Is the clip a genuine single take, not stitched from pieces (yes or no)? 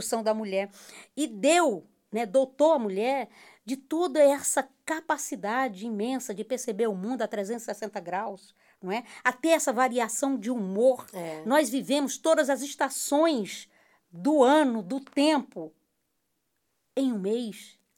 yes